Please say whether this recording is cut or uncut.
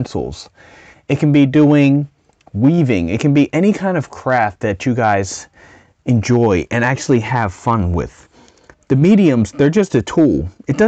uncut